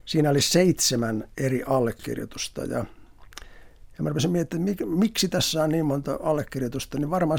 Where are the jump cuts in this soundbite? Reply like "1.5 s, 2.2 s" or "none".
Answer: none